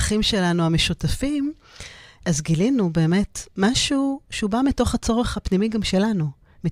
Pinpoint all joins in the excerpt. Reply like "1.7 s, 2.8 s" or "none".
2.2 s